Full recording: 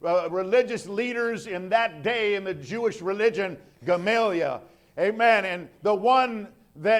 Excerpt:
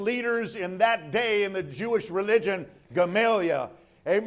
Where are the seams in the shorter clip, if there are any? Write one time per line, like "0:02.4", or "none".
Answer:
none

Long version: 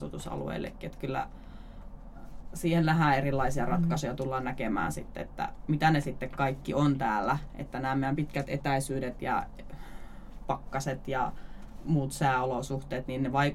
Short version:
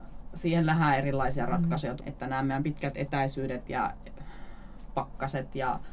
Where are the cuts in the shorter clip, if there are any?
0:02.0

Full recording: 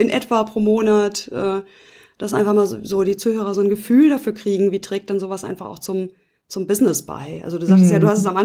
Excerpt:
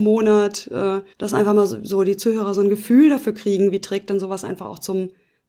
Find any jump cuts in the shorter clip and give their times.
0:01.1

